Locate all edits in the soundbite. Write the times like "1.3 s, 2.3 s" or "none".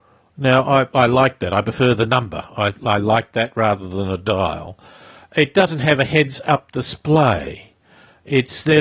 none